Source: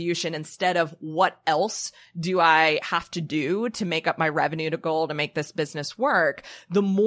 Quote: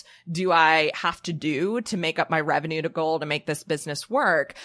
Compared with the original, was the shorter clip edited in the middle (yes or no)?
no